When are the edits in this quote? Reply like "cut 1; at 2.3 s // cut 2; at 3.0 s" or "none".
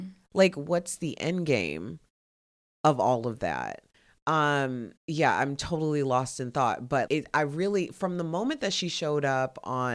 cut 1; at 5.0 s // cut 2; at 7.1 s